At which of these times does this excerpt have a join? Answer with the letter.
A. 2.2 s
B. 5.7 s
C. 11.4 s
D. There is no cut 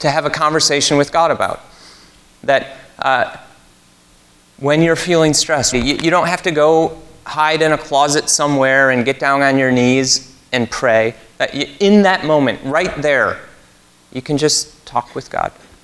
B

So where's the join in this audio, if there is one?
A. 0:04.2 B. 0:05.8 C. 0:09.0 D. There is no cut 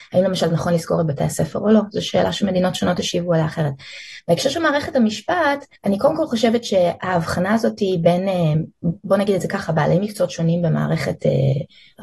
B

